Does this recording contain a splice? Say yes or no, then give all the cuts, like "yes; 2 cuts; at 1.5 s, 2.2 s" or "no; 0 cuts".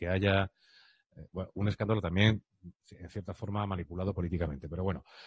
no; 0 cuts